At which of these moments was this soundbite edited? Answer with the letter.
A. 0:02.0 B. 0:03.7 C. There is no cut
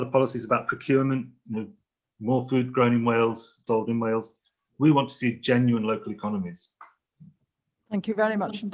B